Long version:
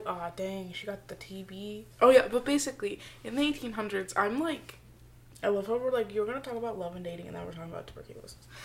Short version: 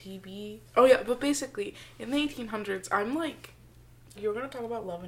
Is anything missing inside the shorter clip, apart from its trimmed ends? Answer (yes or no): yes